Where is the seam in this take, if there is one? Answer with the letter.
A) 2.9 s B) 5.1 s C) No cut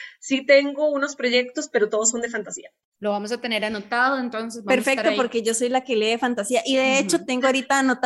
C